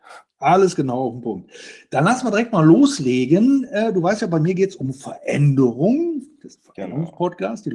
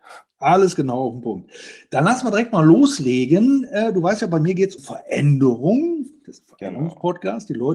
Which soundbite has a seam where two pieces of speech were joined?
second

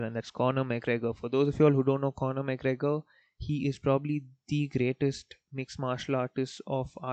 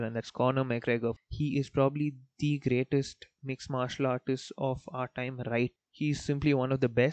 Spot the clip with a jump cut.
second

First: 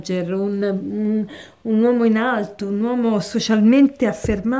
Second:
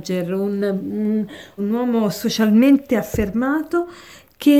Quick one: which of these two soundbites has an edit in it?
second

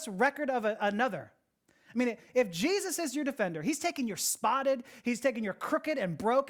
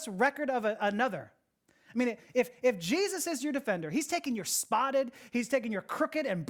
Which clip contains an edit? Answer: first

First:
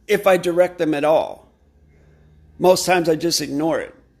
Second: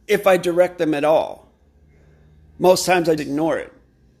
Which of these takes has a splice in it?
second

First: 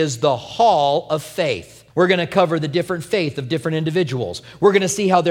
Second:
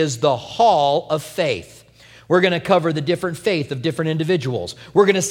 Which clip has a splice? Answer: first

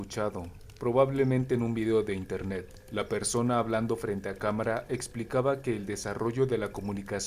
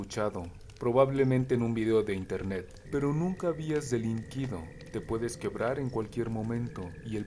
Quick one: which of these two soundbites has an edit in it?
second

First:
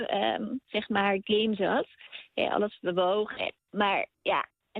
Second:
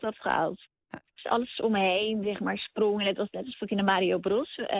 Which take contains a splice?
second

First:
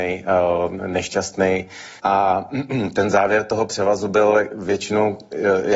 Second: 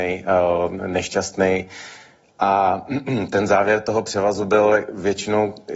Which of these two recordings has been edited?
first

